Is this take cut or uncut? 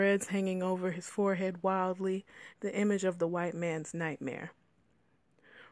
cut